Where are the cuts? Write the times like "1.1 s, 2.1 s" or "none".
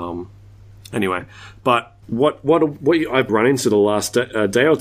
2.0 s, 3.3 s